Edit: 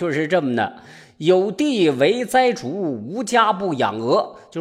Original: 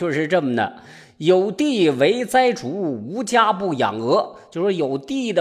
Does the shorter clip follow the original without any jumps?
yes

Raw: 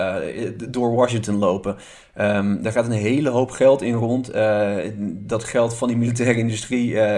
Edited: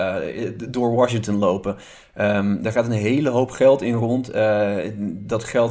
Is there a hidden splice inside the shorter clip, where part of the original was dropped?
no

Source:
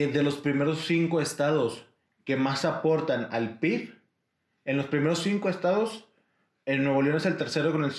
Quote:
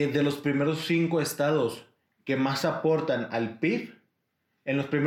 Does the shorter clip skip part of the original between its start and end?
no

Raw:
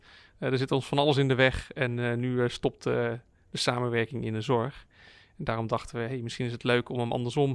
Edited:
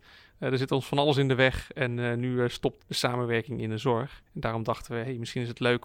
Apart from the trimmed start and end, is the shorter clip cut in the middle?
yes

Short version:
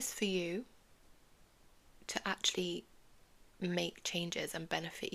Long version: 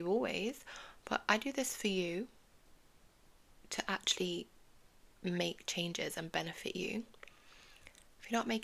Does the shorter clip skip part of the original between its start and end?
no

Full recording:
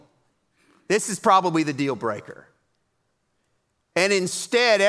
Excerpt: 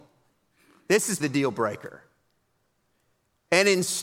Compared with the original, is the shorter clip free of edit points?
no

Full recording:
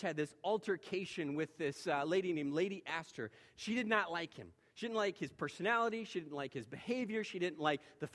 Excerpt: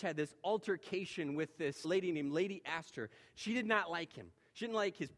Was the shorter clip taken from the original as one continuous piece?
no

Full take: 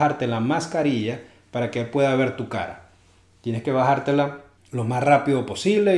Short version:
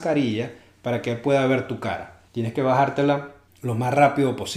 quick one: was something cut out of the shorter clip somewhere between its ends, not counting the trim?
yes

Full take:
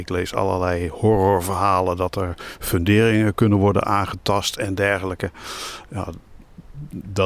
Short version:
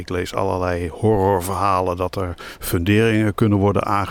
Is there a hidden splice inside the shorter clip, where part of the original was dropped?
no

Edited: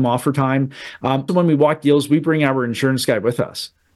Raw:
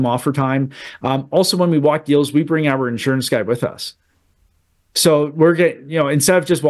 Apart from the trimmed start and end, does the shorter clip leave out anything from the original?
yes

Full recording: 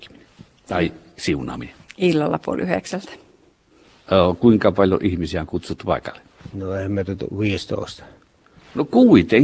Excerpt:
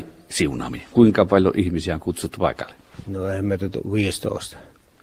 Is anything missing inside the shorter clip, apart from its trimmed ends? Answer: yes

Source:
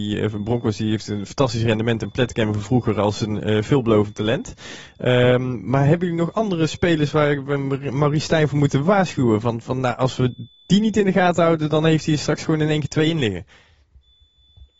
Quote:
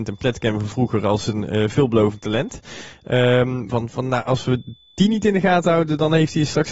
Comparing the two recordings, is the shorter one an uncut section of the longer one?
no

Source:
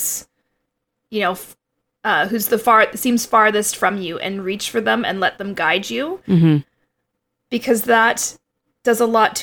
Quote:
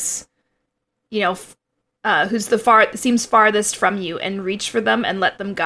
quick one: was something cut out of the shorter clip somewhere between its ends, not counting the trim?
no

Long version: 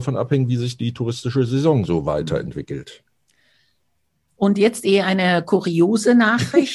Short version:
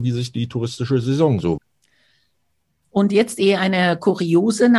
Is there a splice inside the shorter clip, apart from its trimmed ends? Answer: yes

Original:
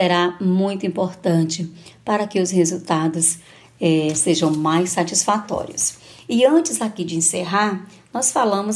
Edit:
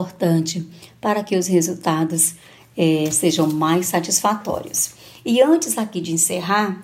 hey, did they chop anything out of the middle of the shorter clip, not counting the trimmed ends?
no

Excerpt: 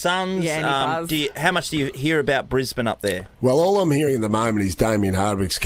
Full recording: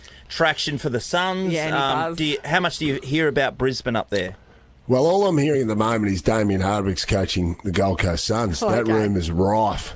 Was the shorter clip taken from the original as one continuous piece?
no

